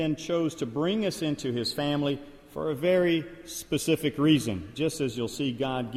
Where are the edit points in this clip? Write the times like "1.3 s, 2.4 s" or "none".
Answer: none

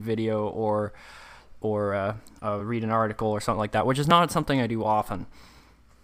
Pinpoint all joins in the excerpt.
none

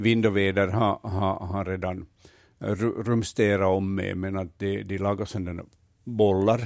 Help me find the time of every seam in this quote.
none

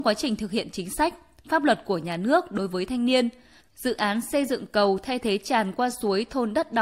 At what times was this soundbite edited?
3.6 s

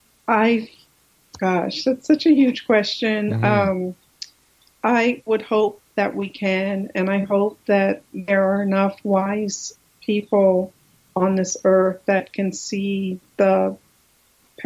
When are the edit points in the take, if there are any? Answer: none

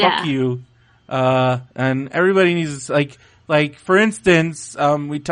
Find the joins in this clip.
1.7 s

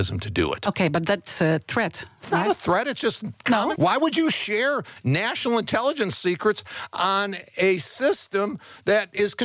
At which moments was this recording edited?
3.8 s

